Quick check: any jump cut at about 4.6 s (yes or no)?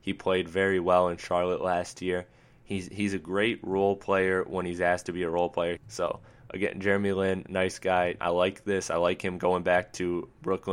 no